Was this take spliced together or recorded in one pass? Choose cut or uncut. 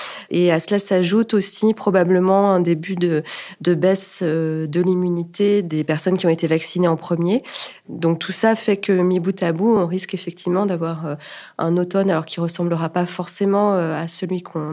uncut